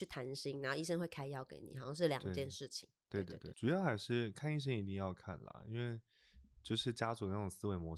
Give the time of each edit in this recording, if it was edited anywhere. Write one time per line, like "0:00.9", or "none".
0:03.5

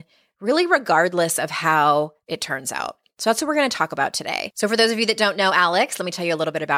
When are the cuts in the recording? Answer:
none

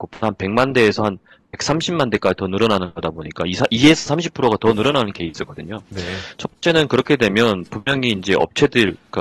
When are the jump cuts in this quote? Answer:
none

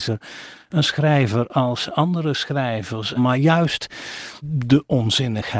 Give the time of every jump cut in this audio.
0:03.2
0:04.4

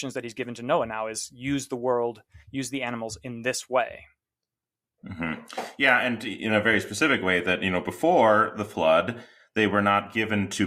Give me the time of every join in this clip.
none

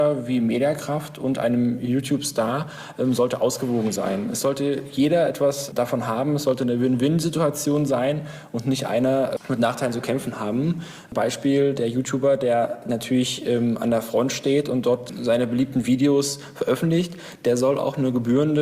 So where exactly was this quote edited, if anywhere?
none

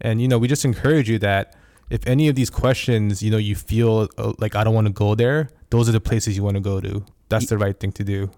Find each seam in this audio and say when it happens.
none

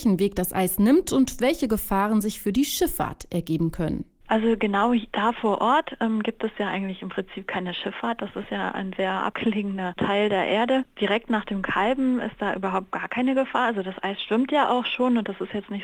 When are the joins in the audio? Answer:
none

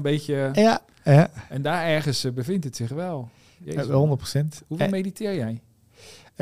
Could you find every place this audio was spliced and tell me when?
none

